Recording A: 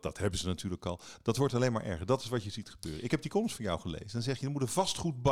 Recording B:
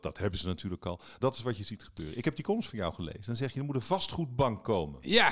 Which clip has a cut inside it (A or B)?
B